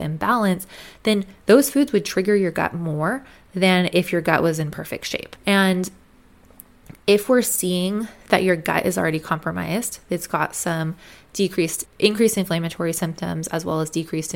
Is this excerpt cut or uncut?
cut